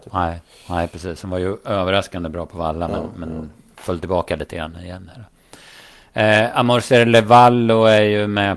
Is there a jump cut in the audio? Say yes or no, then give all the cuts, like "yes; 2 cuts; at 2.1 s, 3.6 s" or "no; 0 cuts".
no; 0 cuts